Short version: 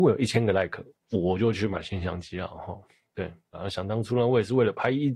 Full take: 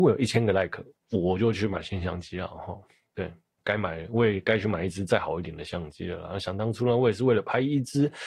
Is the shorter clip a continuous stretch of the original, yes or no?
no